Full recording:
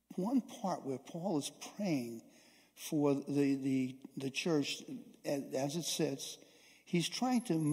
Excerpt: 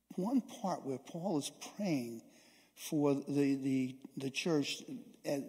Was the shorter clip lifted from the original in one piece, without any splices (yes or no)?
yes